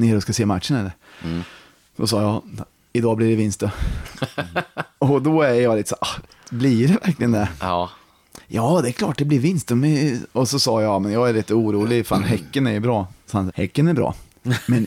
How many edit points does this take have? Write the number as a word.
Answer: one